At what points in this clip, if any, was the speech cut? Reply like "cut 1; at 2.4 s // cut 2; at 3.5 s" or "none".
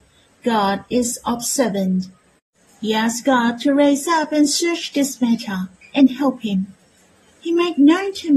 cut 1; at 7.4 s